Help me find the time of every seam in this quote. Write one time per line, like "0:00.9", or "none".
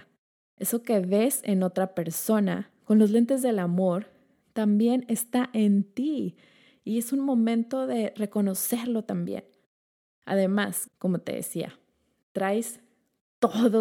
0:10.9